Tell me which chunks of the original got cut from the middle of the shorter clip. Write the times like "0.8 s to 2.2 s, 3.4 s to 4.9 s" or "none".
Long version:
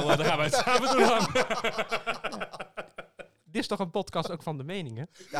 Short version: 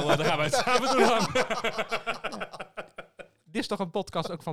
none